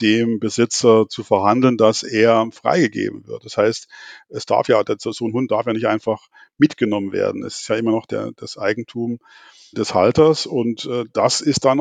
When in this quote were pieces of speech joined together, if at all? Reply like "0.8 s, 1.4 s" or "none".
none